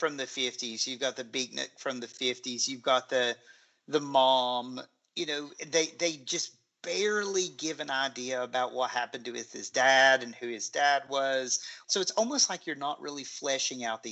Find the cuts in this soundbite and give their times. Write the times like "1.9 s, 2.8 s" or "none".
11.8 s